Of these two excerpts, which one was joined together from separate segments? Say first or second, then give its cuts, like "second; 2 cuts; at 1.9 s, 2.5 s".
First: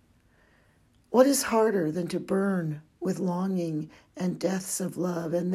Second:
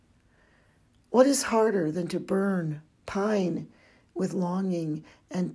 first; 1 cut; at 3.0 s